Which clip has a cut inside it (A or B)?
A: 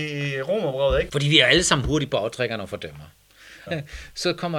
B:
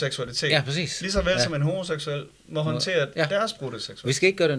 A